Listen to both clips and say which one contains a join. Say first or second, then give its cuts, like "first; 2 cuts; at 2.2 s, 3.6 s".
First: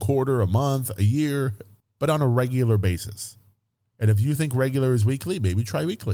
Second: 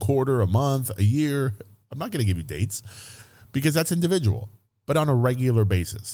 first; 1 cut; at 1.8 s